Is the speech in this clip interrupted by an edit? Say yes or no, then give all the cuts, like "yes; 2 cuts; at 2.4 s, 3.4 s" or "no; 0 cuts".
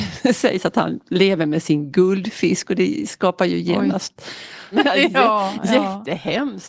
yes; 1 cut; at 4.7 s